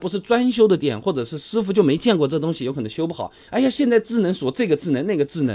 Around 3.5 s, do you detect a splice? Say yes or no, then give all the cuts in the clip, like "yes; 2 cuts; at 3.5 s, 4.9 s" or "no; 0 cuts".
yes; 1 cut; at 3.5 s